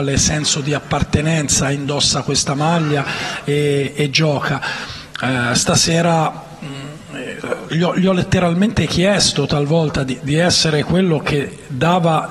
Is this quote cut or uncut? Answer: uncut